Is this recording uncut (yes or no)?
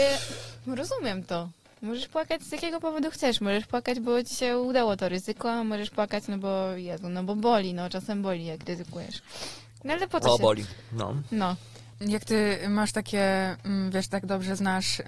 yes